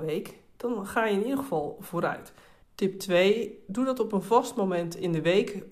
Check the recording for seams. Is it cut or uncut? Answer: cut